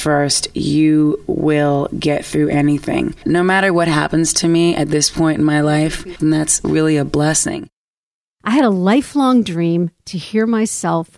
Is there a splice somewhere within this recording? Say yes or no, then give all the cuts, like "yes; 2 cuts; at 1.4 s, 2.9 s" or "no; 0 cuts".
yes; 1 cut; at 6.2 s